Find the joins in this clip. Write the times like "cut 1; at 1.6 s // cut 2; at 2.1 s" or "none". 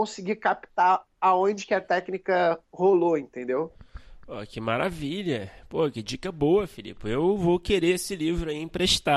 none